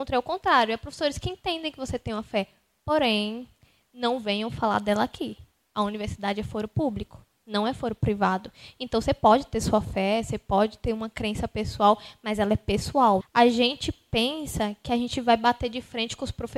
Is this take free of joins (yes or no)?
no